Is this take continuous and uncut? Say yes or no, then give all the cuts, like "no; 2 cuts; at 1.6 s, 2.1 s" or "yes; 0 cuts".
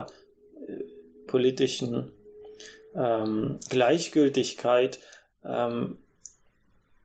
no; 1 cut; at 1.3 s